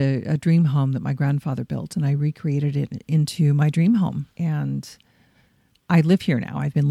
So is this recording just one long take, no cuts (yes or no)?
no